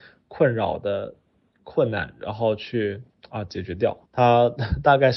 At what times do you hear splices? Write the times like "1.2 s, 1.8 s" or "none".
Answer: 4.1 s